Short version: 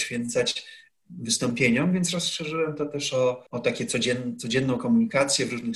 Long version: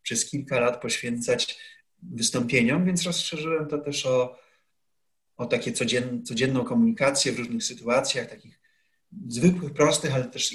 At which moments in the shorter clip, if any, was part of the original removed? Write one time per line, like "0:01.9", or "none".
0:03.5